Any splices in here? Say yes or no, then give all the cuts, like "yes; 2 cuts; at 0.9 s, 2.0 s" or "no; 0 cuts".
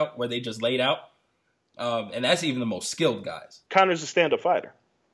yes; 1 cut; at 3.7 s